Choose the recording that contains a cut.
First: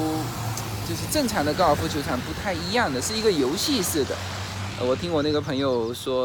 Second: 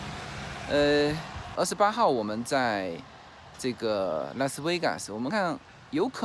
second; 2 cuts; at 1.6 s, 5.3 s

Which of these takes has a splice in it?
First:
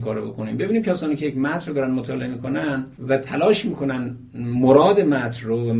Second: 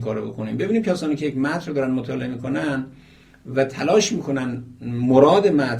first; 1 cut; at 3.0 s

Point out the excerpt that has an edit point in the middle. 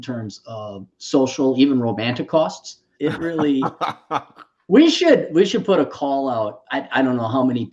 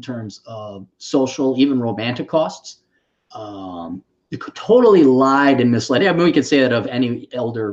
first; 2 cuts; at 2.9 s, 6.7 s

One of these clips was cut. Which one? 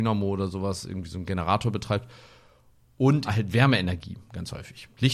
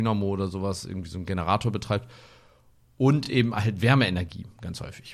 first; 1 cut; at 3.2 s

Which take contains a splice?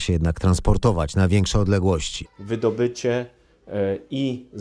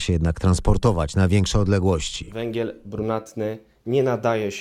first; 1 cut; at 2.2 s

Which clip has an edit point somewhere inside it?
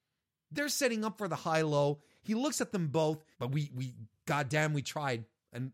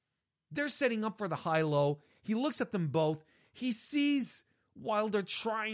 first; 1 cut; at 3.3 s

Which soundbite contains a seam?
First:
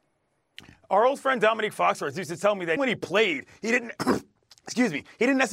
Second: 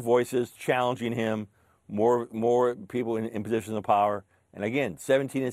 first; 1 cut; at 2.8 s

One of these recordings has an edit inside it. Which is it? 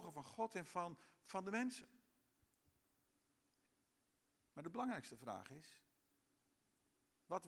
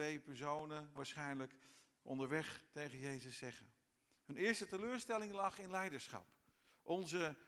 second; 1 cut; at 1.0 s

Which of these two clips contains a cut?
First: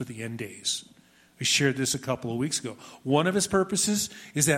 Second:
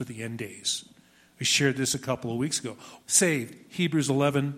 second; 1 cut; at 3.0 s

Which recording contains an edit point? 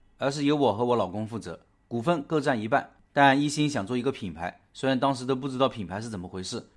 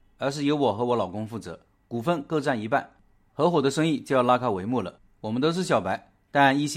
first; 1 cut; at 3.1 s

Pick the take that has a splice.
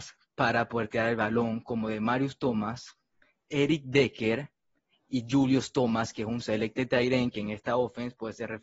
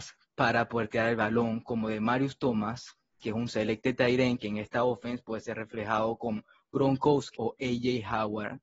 second; 2 cuts; at 3.2 s, 7.4 s

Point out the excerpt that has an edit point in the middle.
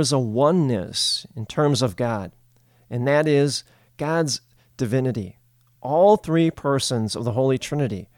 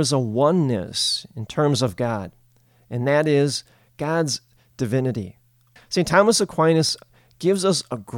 second; 1 cut; at 5.8 s

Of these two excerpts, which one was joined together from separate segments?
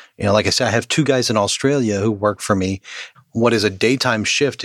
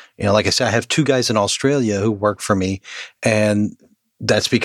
first; 1 cut; at 3.1 s

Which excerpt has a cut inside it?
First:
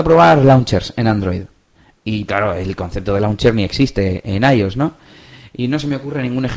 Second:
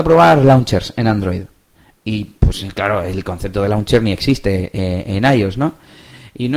first; 2 cuts; at 2.3 s, 4.2 s

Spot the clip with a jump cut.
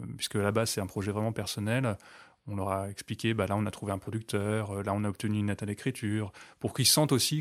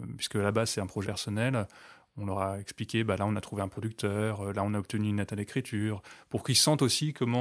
second; 1 cut; at 1.0 s

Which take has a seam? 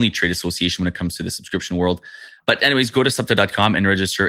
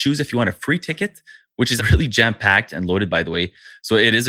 second; 1 cut; at 1.8 s

